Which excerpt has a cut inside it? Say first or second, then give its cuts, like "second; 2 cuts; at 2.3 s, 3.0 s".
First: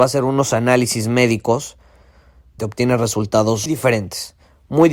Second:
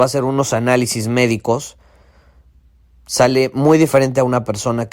first; 2 cuts; at 2.6 s, 3.7 s